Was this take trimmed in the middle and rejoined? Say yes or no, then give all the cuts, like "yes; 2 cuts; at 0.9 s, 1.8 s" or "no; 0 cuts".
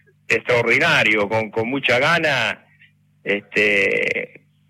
no; 0 cuts